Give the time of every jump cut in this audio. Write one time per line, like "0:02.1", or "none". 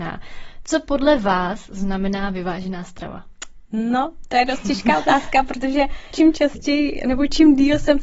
0:06.1